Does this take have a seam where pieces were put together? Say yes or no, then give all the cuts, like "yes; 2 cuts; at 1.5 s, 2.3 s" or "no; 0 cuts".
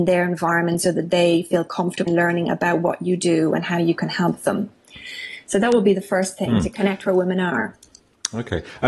yes; 1 cut; at 2.1 s